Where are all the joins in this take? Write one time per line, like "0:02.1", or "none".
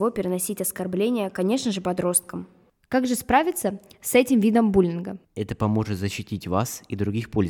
0:05.2